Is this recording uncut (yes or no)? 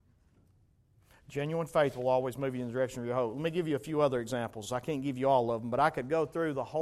yes